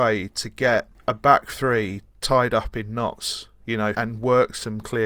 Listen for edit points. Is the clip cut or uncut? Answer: cut